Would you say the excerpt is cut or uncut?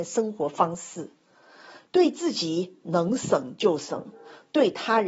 uncut